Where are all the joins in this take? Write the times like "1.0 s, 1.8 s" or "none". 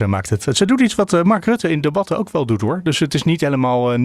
none

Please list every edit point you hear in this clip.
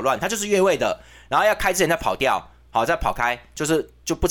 none

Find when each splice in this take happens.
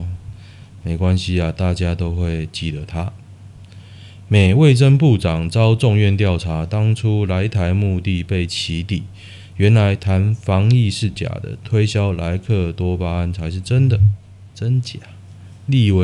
14.5 s

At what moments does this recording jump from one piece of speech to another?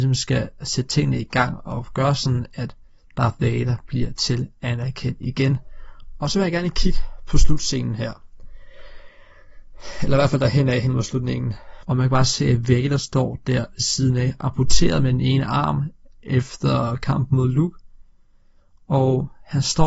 11.8 s

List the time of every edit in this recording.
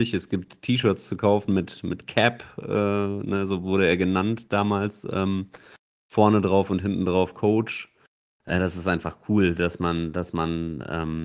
none

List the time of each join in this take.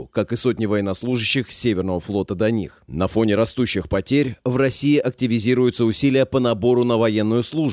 none

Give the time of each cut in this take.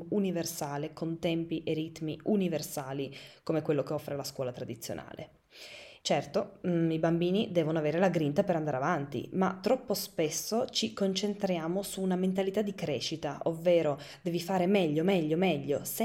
6.0 s

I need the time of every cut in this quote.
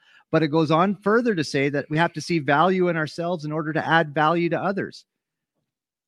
none

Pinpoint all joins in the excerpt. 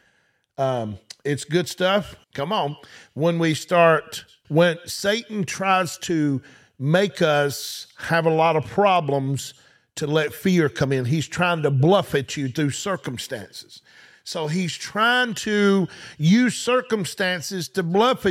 2.2 s, 4.4 s

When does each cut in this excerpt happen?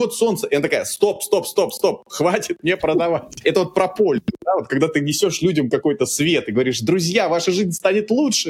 none

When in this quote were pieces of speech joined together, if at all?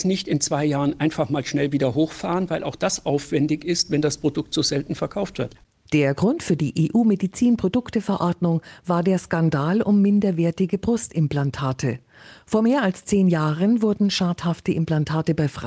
none

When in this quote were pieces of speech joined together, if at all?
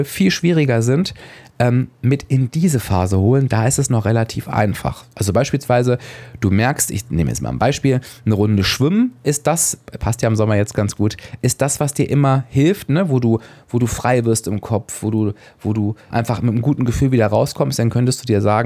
16.1 s

